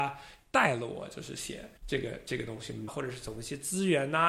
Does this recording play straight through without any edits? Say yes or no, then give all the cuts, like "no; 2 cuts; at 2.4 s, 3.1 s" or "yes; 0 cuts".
no; 2 cuts; at 1.8 s, 2.9 s